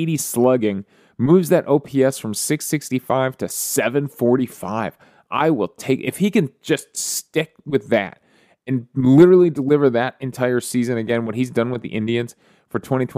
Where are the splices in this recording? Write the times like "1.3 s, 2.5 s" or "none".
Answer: none